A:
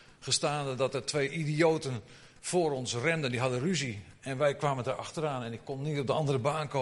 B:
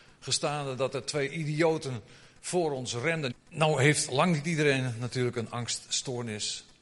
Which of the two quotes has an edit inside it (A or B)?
B